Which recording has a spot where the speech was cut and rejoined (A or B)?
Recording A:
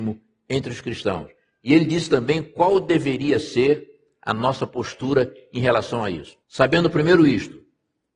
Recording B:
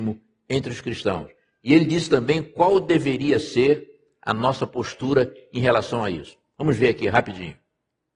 A